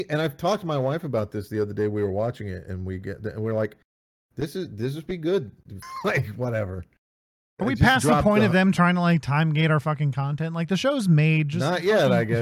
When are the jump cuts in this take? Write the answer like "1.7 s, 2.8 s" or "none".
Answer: 5.8 s